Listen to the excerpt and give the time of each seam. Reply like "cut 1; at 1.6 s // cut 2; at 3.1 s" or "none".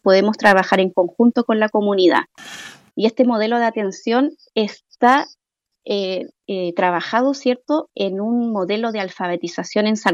cut 1; at 2.9 s

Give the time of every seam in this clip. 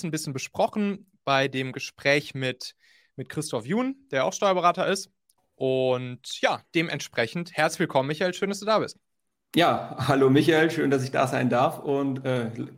cut 1; at 5.4 s

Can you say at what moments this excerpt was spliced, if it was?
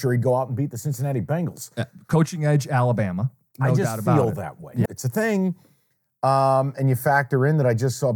cut 1; at 4.9 s

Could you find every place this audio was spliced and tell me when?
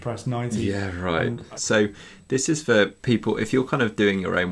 cut 1; at 1.6 s // cut 2; at 3.0 s

